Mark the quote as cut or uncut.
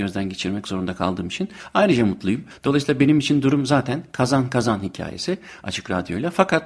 uncut